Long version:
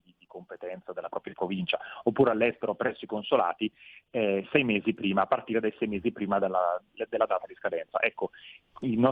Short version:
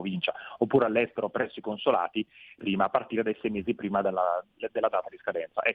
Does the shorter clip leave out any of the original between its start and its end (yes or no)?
yes